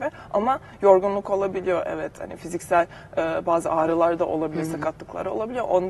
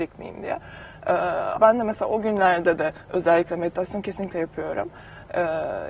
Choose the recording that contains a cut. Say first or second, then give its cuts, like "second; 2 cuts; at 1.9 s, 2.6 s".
second; 1 cut; at 1.6 s